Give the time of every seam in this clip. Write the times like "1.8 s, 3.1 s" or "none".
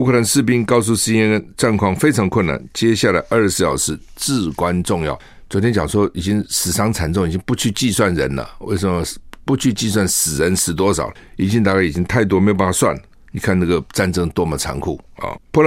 none

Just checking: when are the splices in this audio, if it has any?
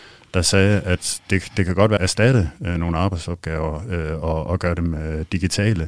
2.0 s

